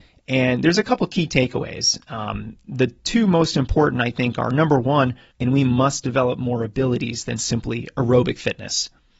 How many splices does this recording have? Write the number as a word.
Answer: one